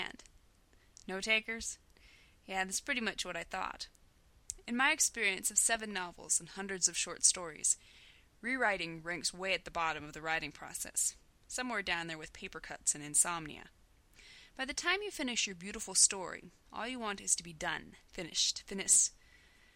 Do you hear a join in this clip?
no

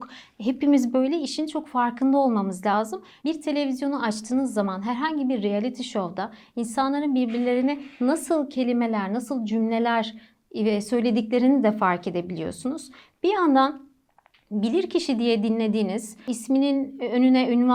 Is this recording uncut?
no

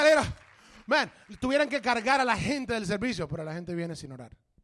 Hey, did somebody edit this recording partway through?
no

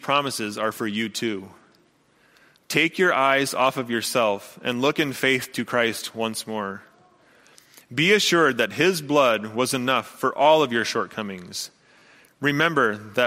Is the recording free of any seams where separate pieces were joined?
yes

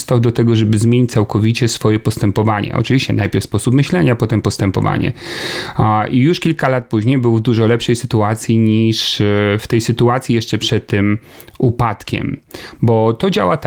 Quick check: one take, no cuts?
yes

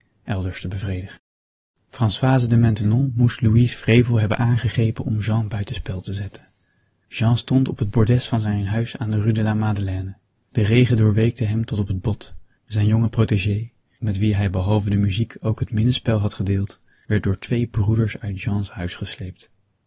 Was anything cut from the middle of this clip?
yes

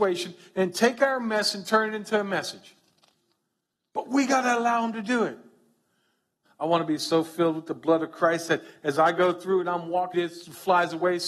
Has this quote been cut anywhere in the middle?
yes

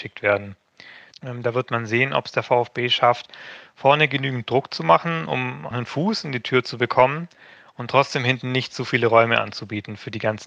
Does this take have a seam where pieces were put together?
yes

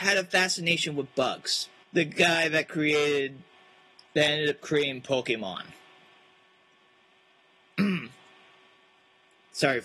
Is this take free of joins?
no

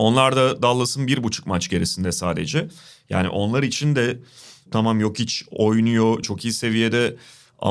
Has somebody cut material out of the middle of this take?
yes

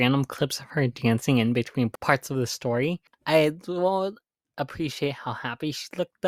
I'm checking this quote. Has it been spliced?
yes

